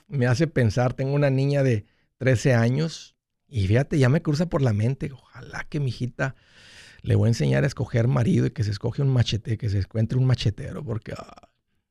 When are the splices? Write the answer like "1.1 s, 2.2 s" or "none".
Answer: none